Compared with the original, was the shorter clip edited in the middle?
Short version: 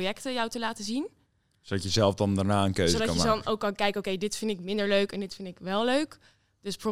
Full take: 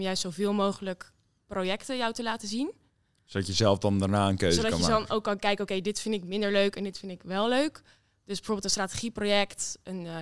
no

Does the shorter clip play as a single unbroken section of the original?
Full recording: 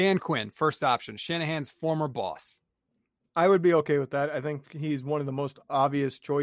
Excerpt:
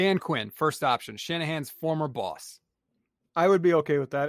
yes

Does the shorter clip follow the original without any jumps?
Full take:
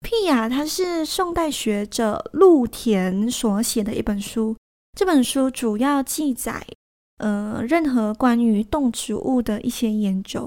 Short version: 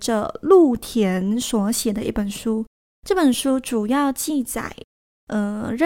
yes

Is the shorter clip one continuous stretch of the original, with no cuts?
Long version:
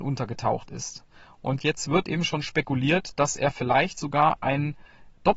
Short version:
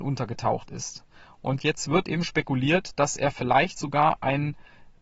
no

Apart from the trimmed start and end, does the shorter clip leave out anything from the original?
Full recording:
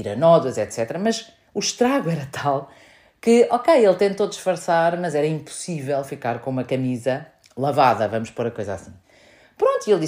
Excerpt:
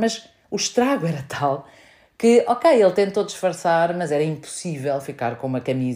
no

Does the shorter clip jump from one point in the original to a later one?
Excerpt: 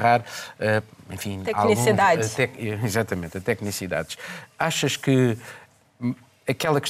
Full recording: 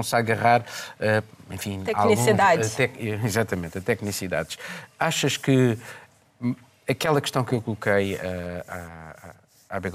no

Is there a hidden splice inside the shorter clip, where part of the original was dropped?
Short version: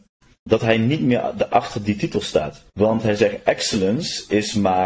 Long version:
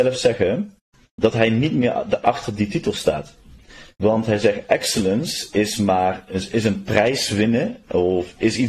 yes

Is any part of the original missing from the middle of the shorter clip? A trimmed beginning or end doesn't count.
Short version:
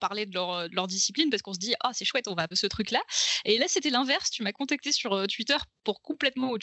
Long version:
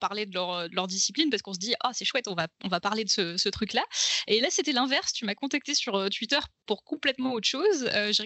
yes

